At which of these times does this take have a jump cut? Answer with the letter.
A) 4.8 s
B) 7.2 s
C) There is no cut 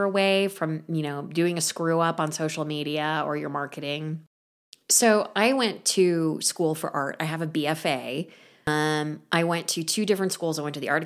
C